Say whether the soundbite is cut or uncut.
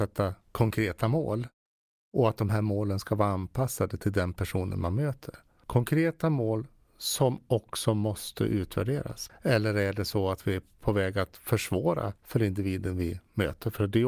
cut